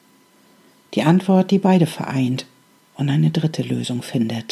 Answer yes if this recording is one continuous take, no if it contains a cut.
yes